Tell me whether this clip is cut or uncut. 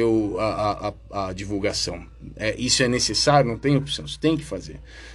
uncut